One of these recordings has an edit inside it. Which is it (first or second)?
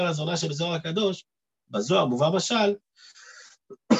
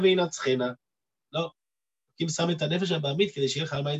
second